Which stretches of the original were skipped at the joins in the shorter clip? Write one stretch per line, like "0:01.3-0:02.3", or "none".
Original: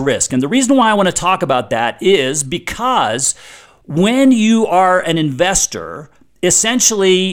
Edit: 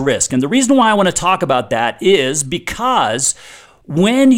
none